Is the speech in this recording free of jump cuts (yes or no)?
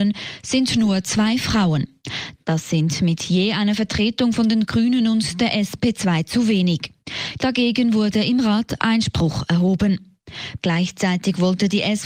no